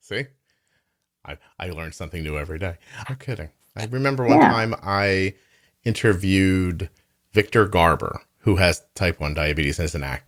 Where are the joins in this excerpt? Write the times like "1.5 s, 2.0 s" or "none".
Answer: 3.0 s